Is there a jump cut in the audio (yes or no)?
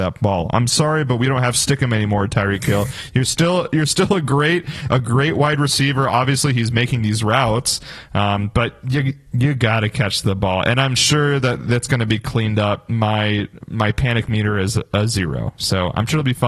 no